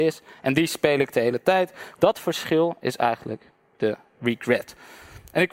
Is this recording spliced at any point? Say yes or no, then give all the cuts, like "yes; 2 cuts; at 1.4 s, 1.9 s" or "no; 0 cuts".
yes; 1 cut; at 1.9 s